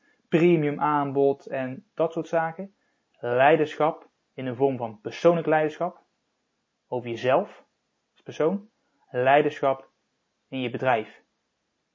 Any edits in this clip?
yes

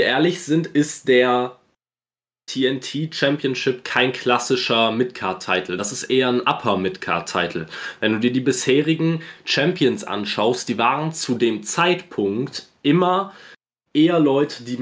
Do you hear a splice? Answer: no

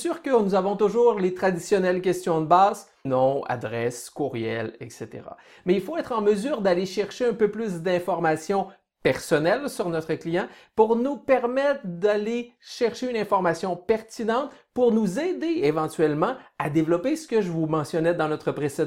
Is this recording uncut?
no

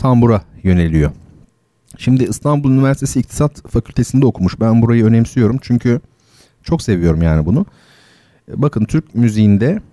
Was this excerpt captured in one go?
yes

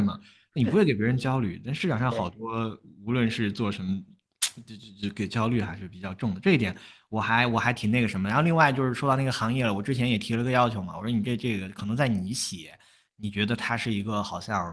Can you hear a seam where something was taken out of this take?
no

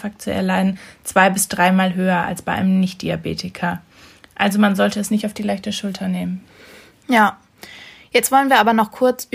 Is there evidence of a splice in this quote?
no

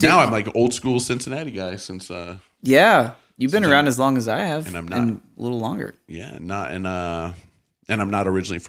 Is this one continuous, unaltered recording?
yes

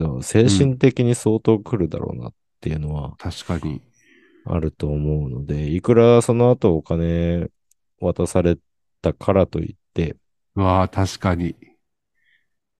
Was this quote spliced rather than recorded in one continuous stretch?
no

